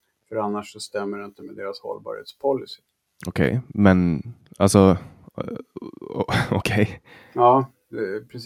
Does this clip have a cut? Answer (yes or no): no